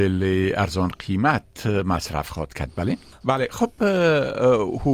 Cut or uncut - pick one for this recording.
cut